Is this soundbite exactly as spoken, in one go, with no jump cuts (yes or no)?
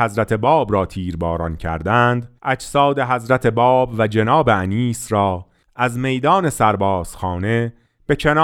no